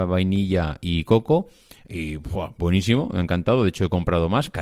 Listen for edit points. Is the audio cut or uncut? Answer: uncut